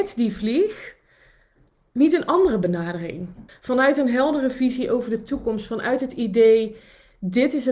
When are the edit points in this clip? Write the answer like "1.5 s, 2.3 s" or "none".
3.5 s